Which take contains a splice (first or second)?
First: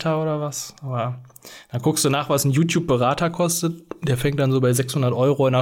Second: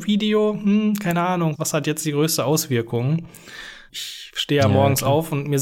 second